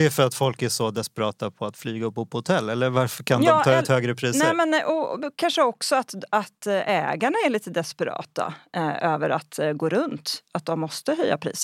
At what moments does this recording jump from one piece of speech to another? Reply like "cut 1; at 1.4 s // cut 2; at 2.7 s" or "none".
none